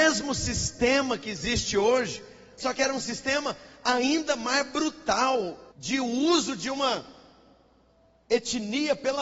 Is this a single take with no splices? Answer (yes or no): no